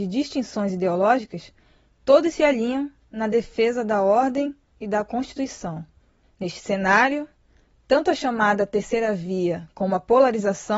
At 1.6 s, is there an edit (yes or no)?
no